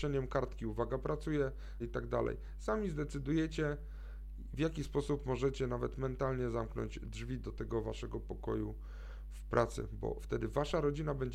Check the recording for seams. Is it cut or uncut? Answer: cut